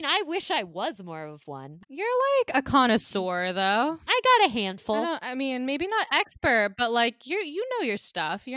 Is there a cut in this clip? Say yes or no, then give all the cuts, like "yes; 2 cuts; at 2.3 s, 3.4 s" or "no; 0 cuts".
yes; 1 cut; at 1.8 s